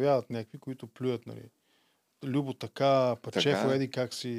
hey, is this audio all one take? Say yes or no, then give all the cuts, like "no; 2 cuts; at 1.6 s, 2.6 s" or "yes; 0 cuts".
yes; 0 cuts